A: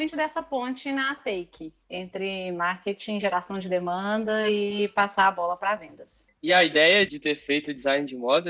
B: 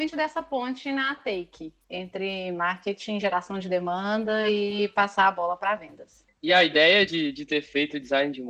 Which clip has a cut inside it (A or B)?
A